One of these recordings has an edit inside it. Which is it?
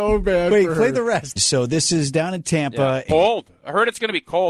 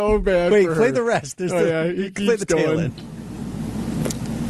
first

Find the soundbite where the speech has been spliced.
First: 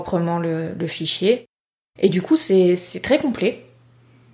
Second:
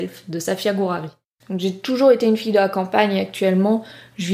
second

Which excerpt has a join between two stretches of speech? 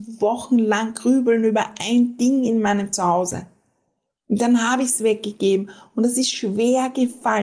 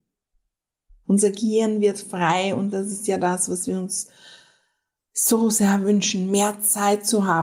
second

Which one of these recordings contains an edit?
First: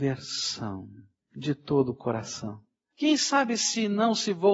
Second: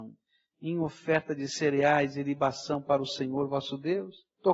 first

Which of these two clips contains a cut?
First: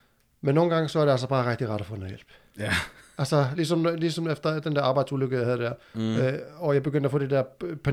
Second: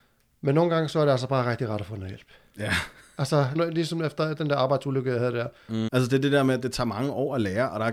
second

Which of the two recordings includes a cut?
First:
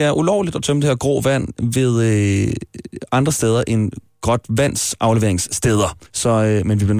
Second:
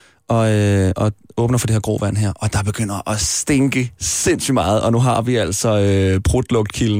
first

